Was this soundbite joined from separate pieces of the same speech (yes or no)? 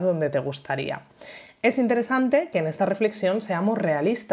yes